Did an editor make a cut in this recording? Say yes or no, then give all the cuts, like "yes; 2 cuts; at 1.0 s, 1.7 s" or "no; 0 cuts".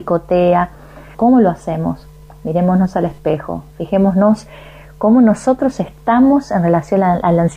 yes; 1 cut; at 1.1 s